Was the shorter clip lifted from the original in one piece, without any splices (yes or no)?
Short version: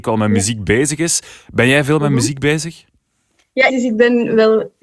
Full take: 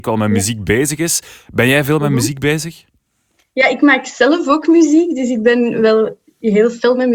no